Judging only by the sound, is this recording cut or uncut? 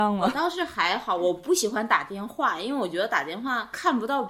uncut